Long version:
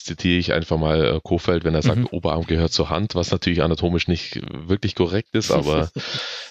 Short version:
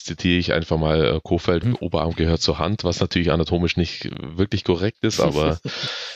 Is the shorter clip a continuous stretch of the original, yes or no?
no